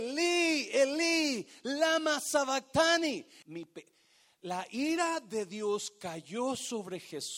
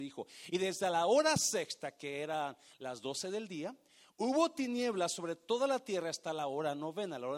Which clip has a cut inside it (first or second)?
first